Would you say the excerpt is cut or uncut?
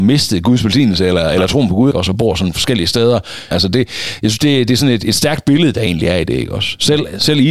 cut